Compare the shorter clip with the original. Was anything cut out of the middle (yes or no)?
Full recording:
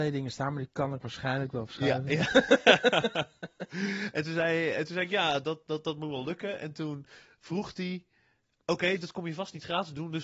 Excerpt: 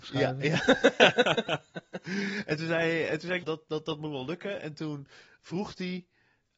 yes